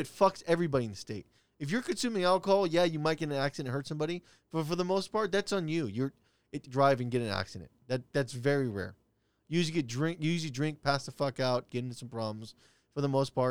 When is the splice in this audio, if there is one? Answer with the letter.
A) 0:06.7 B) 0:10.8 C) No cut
A